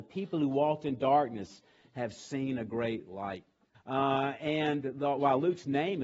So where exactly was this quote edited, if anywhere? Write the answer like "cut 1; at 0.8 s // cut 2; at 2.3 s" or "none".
cut 1; at 3.7 s // cut 2; at 4.8 s